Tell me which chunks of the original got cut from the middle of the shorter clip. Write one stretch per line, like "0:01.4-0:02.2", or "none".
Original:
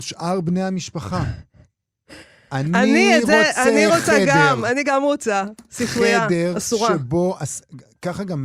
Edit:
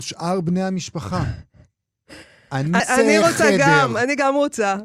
0:02.8-0:03.5